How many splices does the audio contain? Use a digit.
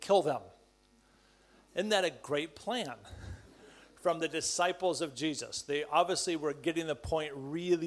0